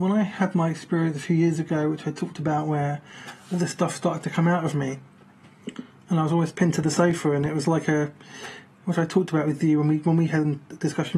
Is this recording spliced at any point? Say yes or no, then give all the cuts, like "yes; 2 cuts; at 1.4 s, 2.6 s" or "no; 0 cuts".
no; 0 cuts